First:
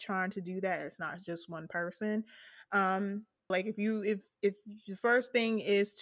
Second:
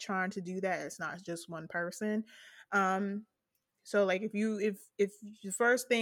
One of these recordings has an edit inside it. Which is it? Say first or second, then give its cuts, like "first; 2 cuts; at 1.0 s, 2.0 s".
first; 1 cut; at 3.5 s